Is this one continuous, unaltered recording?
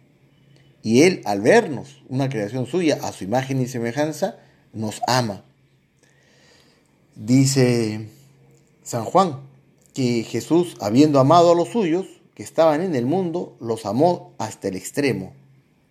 yes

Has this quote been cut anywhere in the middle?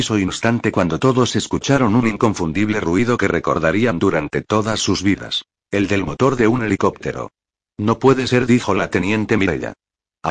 no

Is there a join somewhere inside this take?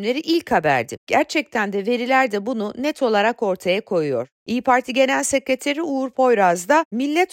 yes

